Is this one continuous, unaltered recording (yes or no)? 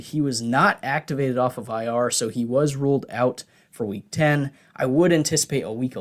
yes